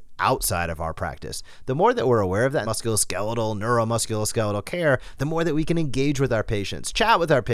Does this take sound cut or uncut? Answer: cut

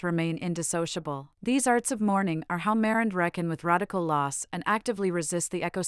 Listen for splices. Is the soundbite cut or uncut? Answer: cut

